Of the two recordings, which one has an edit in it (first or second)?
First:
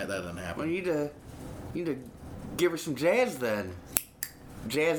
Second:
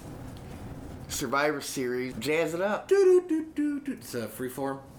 second